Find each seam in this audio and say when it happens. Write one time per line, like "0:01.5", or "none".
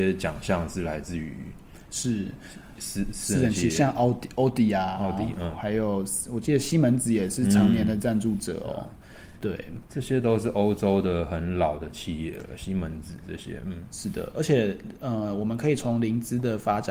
0:02.7